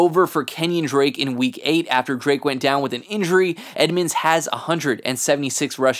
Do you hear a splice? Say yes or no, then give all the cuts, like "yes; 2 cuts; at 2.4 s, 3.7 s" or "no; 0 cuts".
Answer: no; 0 cuts